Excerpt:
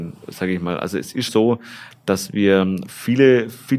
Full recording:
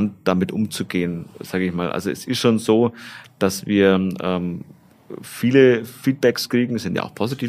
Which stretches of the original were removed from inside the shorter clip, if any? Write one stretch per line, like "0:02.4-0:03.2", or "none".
0:02.4-0:02.6
0:04.2-0:05.2